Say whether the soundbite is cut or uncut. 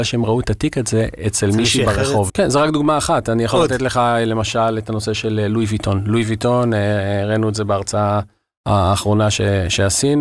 cut